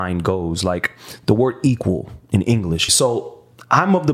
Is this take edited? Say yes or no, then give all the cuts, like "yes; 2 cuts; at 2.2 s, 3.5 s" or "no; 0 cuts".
yes; 1 cut; at 2.9 s